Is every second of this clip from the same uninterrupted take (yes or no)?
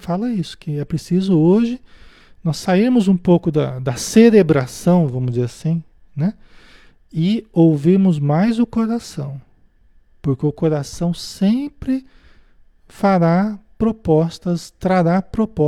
yes